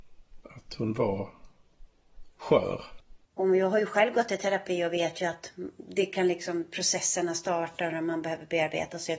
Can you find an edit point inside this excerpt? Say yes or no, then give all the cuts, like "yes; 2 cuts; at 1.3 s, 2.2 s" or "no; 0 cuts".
yes; 1 cut; at 3.3 s